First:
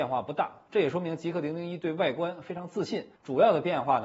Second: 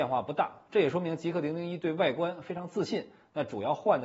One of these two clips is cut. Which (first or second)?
first